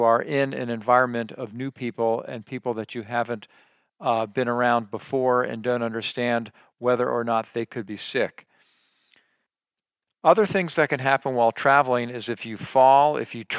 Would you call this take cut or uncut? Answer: uncut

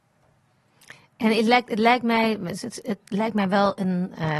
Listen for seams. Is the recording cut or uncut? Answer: uncut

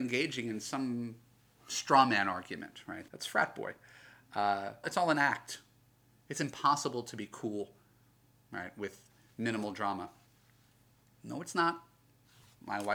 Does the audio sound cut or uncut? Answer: cut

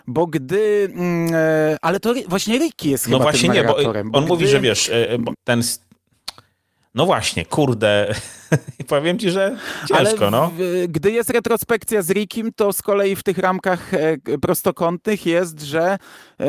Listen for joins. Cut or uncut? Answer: cut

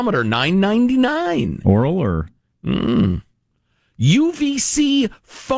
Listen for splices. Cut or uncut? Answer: uncut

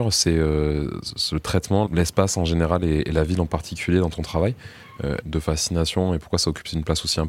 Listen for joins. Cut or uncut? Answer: cut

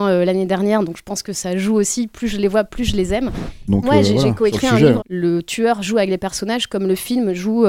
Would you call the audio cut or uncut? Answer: cut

